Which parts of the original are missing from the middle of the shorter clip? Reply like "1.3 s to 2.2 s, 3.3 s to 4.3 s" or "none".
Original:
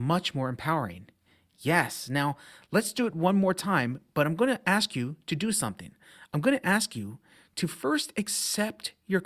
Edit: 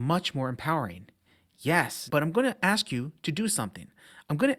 2.1 s to 4.1 s